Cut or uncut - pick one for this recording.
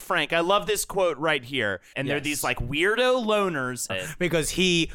cut